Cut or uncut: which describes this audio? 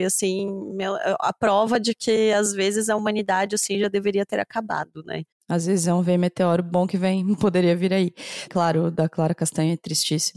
cut